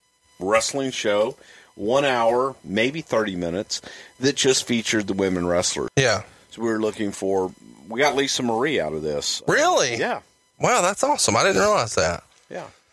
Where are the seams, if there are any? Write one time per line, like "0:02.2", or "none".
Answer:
0:05.9